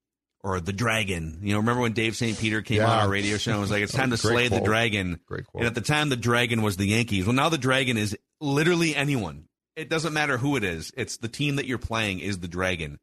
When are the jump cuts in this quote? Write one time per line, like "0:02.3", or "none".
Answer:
none

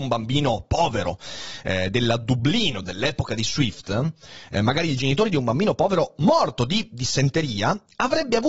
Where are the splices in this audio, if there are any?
none

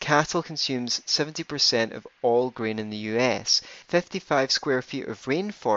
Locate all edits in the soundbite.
0:03.8

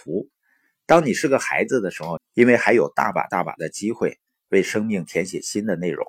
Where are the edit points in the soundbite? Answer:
0:02.2

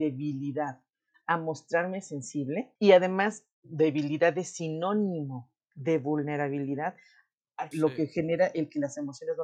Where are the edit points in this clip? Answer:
0:02.8
0:07.7

